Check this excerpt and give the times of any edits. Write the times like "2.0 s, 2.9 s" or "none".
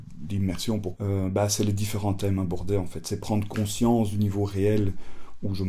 0.9 s